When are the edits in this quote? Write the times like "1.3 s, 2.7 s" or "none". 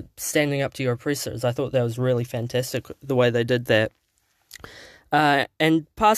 none